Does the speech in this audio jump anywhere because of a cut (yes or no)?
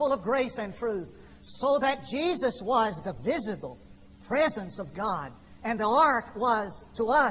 no